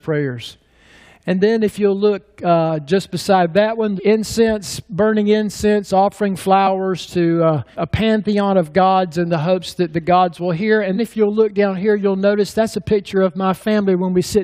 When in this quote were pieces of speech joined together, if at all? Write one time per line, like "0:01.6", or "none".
0:04.0
0:07.7
0:11.0